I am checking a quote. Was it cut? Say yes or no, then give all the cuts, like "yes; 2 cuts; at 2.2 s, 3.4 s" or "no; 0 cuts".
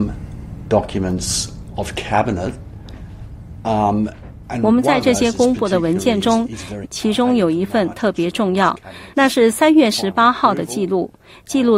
yes; 1 cut; at 6.8 s